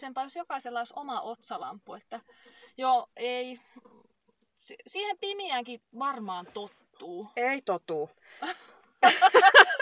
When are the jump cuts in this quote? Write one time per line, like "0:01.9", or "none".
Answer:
none